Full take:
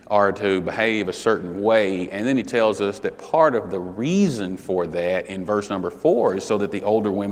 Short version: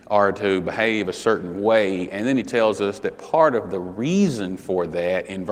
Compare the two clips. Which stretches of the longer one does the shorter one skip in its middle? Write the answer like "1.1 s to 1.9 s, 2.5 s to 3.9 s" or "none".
none